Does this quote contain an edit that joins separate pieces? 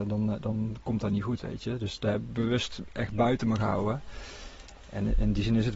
no; 0 cuts

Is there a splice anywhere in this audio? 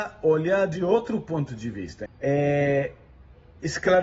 yes; 1 cut; at 2.1 s

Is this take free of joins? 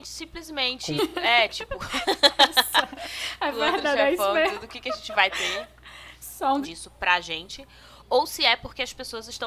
no; 2 cuts; at 1.0 s, 6.6 s

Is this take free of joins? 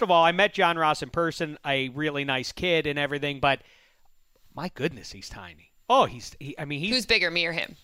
yes; 0 cuts

